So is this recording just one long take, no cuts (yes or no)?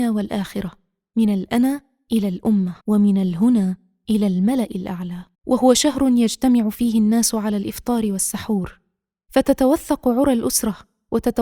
no